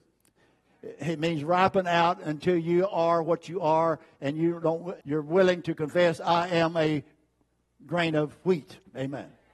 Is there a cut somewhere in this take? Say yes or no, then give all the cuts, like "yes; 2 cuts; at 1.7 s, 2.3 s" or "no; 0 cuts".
yes; 1 cut; at 5.0 s